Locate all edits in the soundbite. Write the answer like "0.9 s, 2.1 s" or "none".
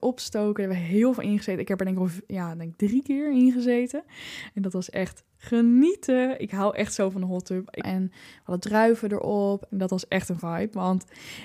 7.8 s, 9.7 s